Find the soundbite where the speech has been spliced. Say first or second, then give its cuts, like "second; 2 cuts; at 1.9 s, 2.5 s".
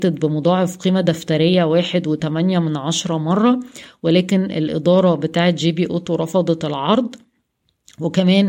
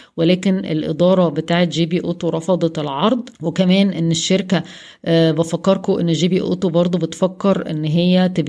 second; 1 cut; at 3.4 s